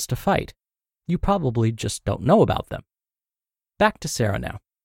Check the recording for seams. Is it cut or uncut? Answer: uncut